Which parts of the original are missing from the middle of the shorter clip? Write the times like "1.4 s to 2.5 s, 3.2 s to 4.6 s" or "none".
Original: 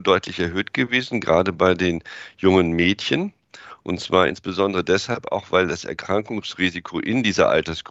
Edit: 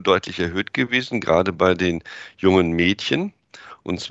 none

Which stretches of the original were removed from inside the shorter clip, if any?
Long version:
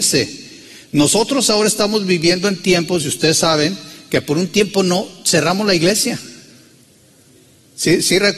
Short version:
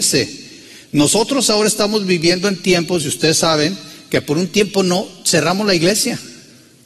none

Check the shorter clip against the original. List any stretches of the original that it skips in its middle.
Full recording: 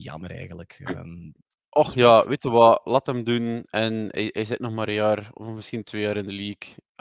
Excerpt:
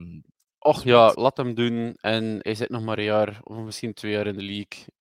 2.2 s to 2.8 s, 4.1 s to 4.3 s

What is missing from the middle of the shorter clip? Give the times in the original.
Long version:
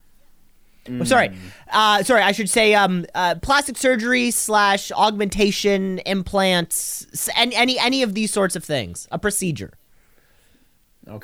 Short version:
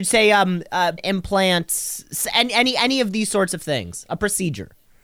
3.4 s to 6.0 s

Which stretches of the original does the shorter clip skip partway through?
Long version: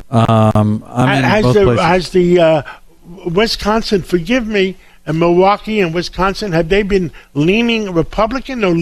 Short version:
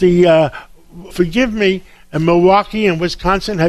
3.2 s to 4.0 s

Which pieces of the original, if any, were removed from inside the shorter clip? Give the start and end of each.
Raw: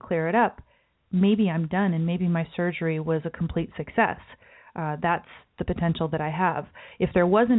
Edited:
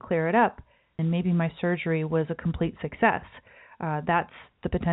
1.0 s to 1.9 s

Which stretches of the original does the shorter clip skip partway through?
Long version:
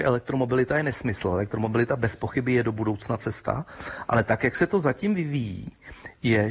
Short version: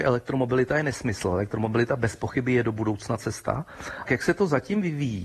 4.0 s to 4.4 s

